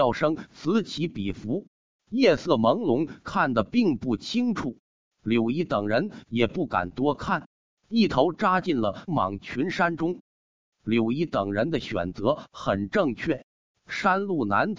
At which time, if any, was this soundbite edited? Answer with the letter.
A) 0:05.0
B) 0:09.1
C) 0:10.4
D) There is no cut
B